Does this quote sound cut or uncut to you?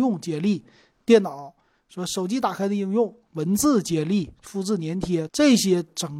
cut